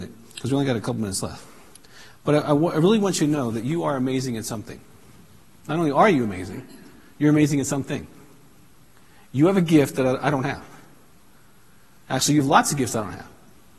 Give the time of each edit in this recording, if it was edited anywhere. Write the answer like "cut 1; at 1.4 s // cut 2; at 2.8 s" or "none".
none